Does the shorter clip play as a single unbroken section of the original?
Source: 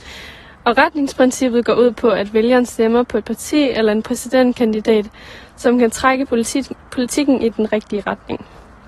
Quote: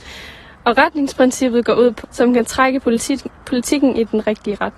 no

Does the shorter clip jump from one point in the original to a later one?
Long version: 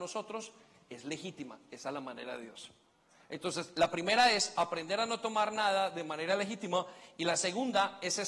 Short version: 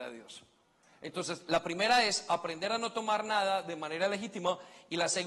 no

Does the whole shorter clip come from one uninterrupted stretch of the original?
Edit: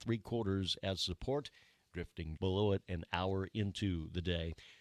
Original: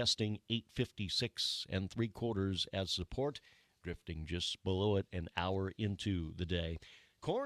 no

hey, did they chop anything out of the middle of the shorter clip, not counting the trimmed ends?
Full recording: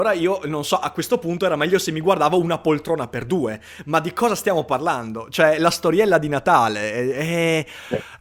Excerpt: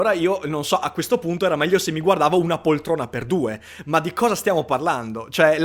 no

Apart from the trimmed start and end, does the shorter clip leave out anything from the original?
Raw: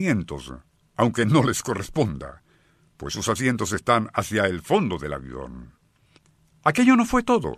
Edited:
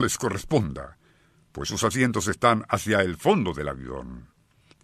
no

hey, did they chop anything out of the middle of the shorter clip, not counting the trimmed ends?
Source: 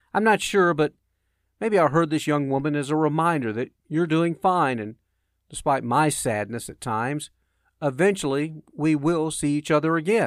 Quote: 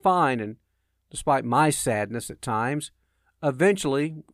no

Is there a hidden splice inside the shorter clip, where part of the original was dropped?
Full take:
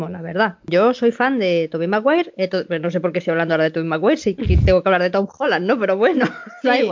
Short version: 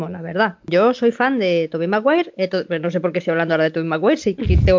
no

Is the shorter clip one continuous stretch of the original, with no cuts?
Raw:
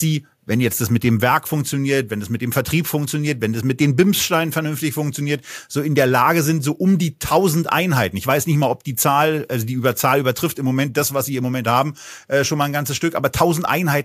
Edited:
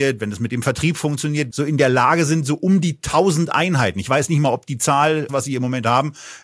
no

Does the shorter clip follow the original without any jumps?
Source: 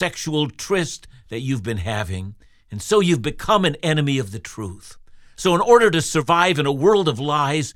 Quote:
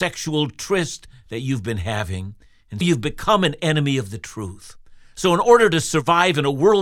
no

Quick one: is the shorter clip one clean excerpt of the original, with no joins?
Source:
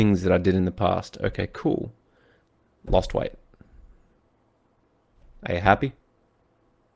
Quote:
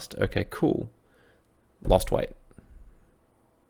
yes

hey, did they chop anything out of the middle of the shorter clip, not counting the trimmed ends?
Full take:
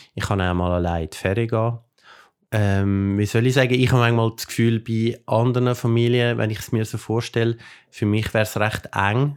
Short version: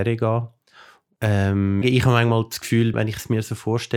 yes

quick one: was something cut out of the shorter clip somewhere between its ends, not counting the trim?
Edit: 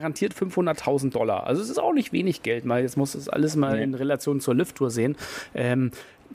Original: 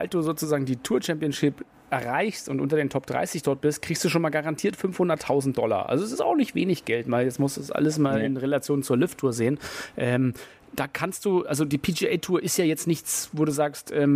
no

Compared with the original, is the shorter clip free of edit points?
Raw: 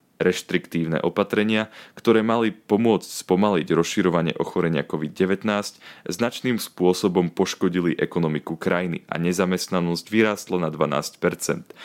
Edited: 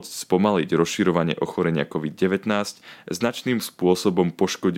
yes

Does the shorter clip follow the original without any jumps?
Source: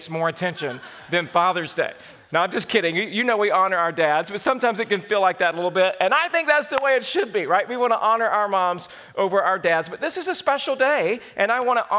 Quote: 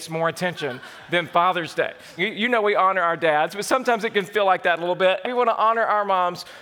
no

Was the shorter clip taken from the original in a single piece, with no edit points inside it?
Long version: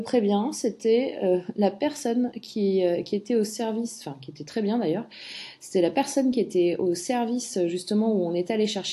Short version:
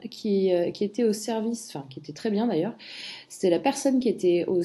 yes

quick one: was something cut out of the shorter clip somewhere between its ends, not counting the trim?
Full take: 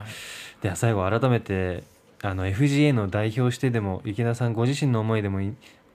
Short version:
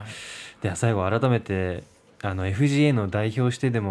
no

